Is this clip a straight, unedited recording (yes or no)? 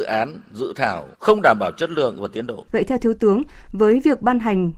no